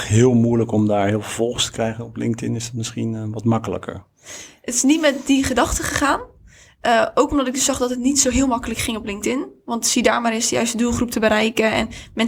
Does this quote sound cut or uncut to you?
uncut